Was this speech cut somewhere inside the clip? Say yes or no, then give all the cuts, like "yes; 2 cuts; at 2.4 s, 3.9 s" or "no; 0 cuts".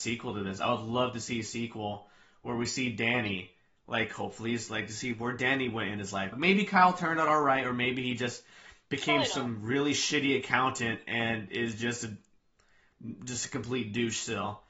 yes; 1 cut; at 6.3 s